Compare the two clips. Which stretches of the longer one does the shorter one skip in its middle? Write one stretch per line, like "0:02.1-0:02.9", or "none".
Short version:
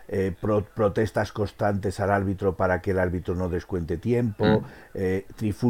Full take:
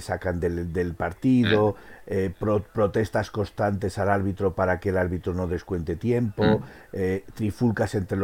none